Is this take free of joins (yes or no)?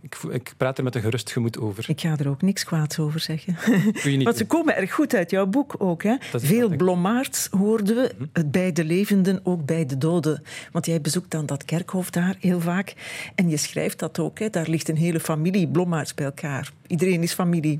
yes